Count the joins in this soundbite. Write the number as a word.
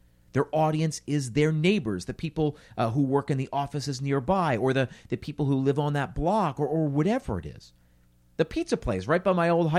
zero